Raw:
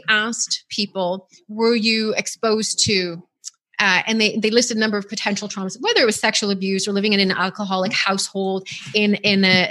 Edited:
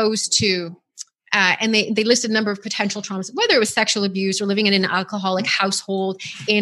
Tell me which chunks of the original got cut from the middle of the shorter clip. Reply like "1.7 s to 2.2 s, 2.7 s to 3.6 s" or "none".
none